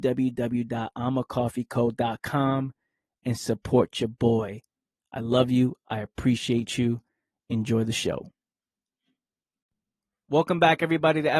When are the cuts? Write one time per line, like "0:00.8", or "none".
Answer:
none